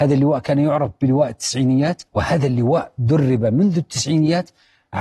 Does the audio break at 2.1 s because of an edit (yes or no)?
yes